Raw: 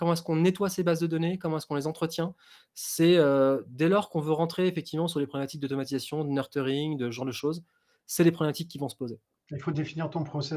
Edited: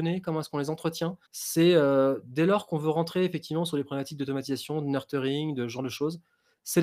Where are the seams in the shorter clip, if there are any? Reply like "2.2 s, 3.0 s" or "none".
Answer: 1.3 s